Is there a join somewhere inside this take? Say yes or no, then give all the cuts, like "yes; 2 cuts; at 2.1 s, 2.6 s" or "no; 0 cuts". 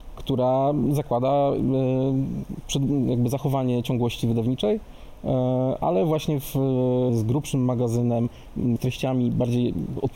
yes; 2 cuts; at 7.1 s, 8.8 s